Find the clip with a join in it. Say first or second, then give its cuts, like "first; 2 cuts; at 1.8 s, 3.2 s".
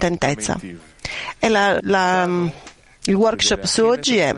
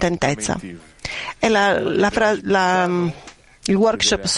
first; 1 cut; at 1.8 s